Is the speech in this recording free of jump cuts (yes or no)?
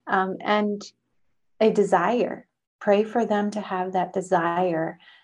yes